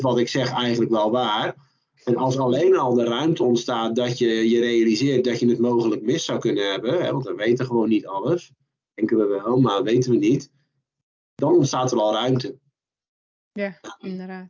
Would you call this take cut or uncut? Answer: uncut